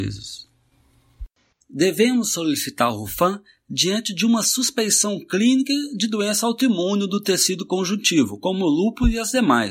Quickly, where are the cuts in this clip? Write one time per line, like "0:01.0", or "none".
0:01.6